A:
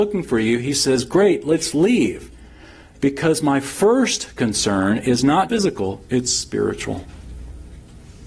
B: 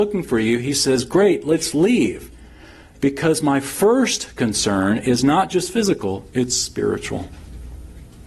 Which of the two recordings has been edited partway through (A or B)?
A